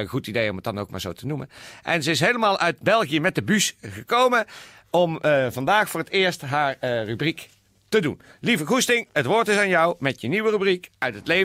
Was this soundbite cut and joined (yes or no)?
no